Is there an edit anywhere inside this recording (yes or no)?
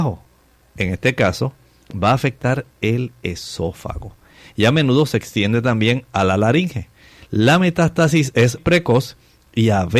yes